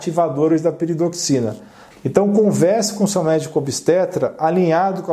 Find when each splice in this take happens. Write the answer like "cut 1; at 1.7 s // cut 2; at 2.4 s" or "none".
cut 1; at 1.9 s